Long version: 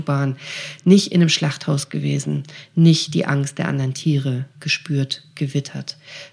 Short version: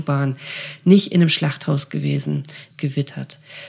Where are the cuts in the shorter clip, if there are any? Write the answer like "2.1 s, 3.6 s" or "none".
2.7 s